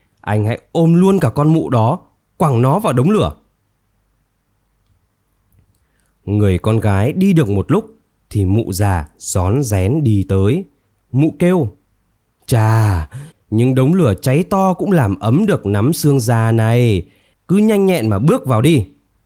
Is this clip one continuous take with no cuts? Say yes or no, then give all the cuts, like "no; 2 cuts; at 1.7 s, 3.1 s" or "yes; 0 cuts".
no; 2 cuts; at 13.3 s, 17.3 s